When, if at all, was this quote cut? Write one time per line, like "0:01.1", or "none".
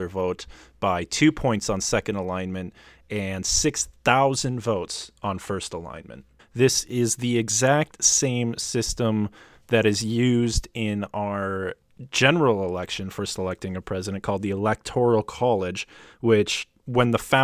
0:06.4